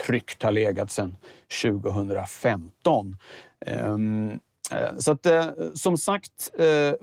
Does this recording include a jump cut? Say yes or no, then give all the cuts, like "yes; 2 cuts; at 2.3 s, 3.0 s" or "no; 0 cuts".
no; 0 cuts